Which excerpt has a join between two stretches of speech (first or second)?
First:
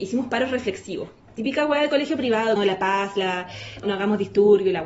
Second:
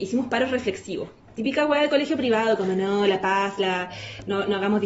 first